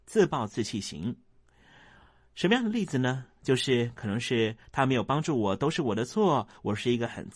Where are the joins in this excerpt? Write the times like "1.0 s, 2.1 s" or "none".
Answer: none